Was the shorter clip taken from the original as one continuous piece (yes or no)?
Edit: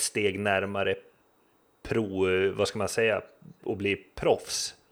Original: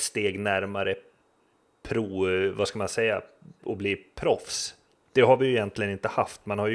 yes